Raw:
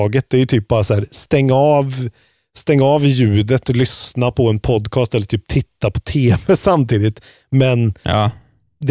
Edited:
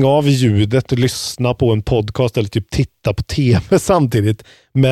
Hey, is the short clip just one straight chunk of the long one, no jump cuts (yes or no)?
yes